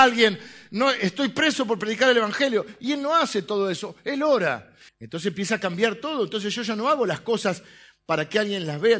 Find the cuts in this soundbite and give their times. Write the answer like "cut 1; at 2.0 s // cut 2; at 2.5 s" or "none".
cut 1; at 4.9 s

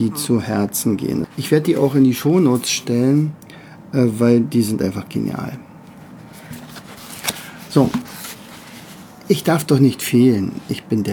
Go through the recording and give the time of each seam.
cut 1; at 1.2 s

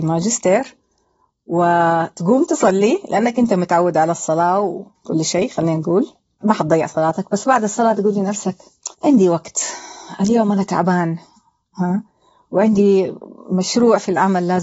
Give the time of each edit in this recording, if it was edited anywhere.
cut 1; at 6.4 s // cut 2; at 8.9 s

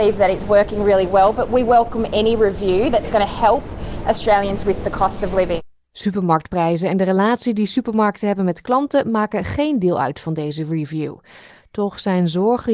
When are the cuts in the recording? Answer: none

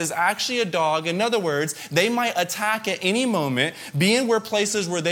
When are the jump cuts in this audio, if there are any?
none

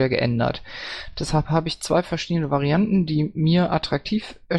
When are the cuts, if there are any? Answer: none

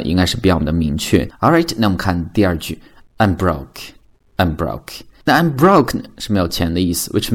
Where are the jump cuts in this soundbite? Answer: cut 1; at 1.3 s

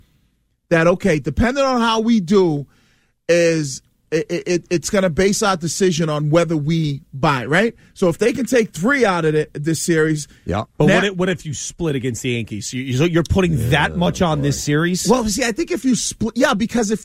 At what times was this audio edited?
none

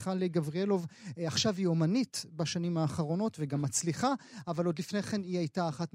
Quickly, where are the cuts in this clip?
none

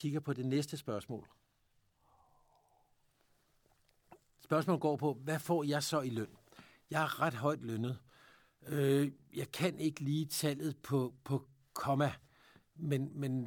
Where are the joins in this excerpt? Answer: none

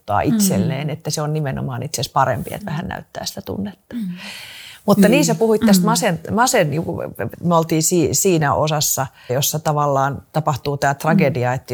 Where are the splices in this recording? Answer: cut 1; at 7.3 s // cut 2; at 9.3 s

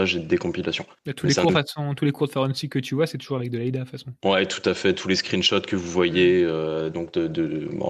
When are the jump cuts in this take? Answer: cut 1; at 1.0 s

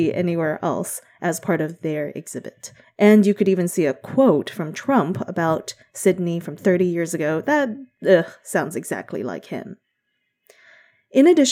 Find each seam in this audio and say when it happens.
cut 1; at 2.8 s

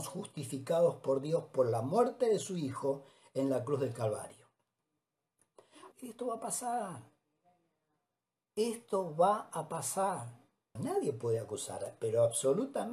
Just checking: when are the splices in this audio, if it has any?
cut 1; at 5.9 s // cut 2; at 10.8 s

